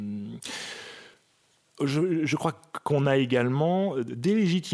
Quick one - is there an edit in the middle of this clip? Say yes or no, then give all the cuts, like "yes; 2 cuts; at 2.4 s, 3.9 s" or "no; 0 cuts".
no; 0 cuts